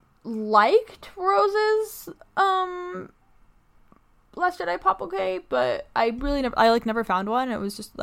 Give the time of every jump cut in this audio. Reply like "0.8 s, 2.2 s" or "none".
none